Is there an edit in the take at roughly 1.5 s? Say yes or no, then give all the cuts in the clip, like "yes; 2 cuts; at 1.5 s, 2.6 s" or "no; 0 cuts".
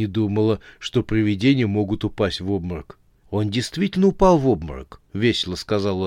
no; 2 cuts; at 3.2 s, 5.0 s